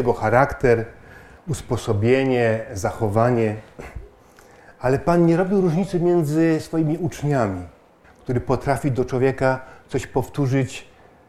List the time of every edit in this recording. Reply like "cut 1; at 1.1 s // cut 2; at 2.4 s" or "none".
cut 1; at 8.0 s